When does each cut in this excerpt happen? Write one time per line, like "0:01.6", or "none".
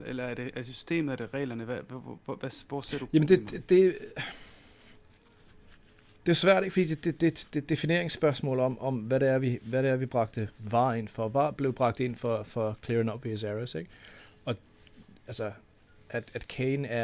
none